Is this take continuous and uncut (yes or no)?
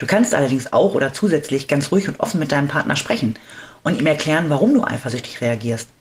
yes